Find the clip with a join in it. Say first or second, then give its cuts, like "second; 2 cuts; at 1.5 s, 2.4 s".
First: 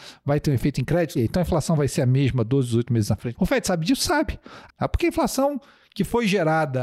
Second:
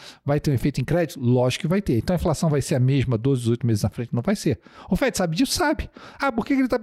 first; 3 cuts; at 1.1 s, 3.4 s, 4.7 s